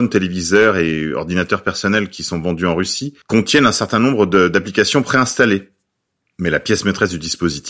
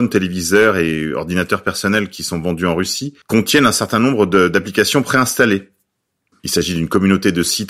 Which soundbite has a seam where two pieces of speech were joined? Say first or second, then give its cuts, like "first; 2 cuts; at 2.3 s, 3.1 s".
second; 1 cut; at 6.3 s